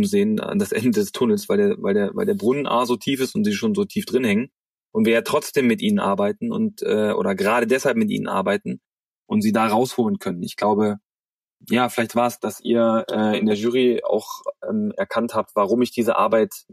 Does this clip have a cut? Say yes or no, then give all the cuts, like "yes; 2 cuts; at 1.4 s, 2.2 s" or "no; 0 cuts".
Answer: no; 0 cuts